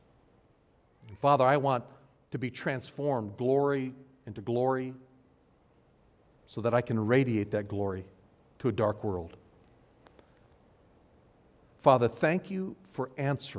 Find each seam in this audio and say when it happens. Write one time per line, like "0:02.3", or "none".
none